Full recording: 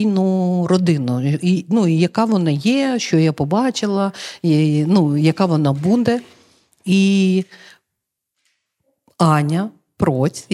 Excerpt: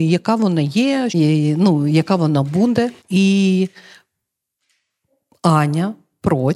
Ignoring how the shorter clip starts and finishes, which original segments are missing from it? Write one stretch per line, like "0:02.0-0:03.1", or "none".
0:03.0-0:04.4
0:06.3-0:06.7